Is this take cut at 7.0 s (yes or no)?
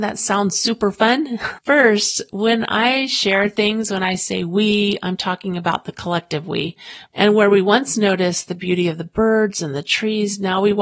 yes